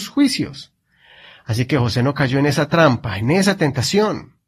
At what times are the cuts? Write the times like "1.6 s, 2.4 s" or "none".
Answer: none